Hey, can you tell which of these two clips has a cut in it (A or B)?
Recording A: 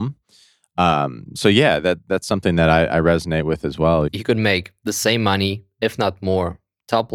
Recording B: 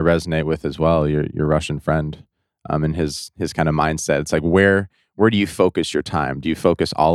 A